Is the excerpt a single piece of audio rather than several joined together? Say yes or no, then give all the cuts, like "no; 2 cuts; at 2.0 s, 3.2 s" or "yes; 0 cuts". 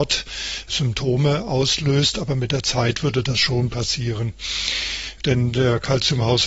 yes; 0 cuts